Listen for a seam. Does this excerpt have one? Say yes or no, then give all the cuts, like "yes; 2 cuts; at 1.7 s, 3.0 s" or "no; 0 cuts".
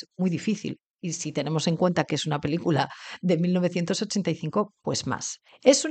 no; 0 cuts